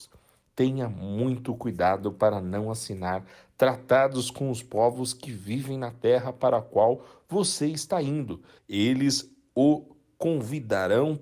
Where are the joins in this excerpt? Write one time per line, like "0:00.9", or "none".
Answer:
0:08.6